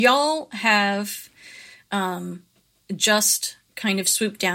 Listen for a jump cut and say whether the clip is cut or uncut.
uncut